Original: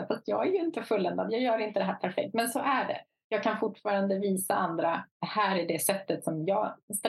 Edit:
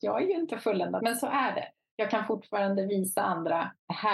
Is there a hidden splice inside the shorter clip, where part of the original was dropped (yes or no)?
yes